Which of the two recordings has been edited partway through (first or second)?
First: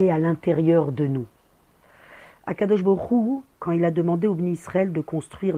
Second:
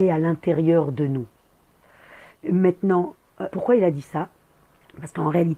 second